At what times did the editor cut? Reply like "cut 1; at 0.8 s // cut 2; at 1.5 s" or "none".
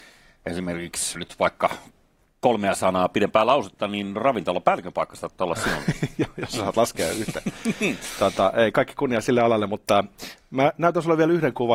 cut 1; at 1.2 s